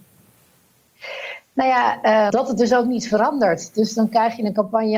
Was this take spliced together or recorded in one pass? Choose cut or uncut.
cut